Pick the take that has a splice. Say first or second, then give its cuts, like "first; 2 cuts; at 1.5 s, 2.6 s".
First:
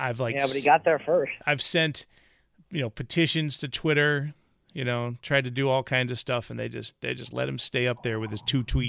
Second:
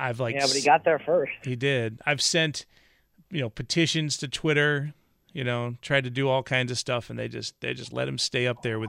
first; 1 cut; at 1.4 s